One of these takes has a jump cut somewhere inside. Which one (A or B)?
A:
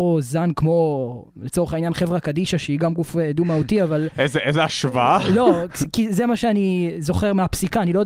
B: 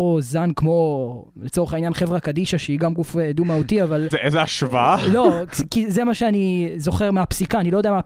B